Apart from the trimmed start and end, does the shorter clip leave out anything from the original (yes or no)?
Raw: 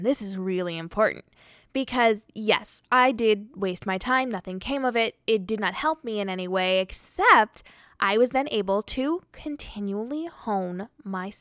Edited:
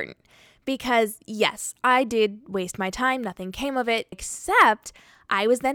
yes